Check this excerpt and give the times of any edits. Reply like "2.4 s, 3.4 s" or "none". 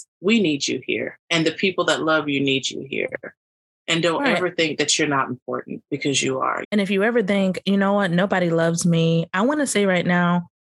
6.6 s